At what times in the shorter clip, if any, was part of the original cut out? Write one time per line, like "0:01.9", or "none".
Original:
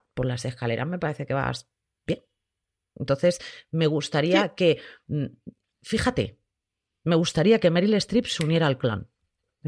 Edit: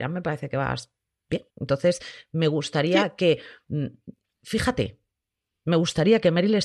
0:01.5